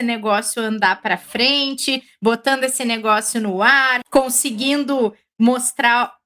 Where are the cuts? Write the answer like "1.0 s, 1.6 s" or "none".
4.0 s